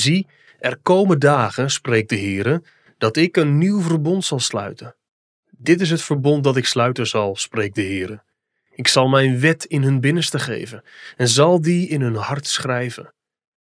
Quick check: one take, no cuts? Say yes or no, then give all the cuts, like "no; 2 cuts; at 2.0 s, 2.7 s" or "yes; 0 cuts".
yes; 0 cuts